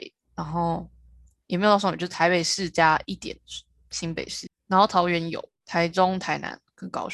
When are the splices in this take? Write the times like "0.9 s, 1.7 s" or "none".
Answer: none